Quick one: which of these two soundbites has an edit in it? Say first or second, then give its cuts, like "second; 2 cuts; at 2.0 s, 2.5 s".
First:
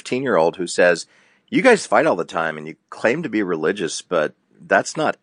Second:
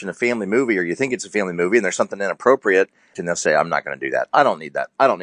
second; 1 cut; at 3.1 s